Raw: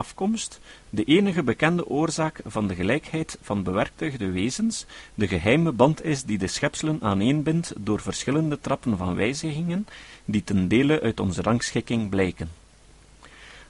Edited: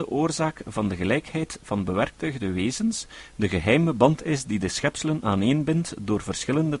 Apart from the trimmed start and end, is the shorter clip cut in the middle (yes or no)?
no